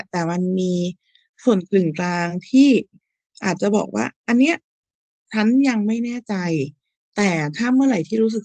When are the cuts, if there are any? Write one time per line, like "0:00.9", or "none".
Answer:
none